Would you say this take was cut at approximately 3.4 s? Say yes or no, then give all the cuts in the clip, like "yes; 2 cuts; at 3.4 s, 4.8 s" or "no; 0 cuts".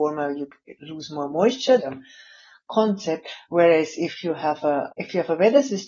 no; 2 cuts; at 1.8 s, 4.9 s